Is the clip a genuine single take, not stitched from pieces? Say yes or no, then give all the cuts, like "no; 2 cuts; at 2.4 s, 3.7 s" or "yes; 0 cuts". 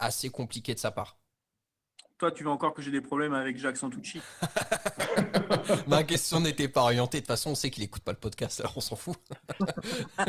yes; 0 cuts